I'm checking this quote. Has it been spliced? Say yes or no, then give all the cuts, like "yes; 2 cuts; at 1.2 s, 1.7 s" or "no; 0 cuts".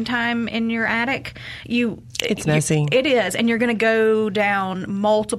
no; 0 cuts